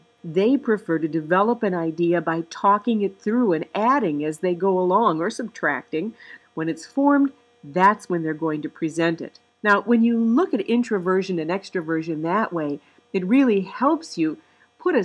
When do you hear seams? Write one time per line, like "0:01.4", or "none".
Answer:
0:06.4